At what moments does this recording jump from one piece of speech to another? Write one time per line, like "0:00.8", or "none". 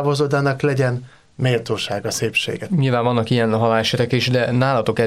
0:02.7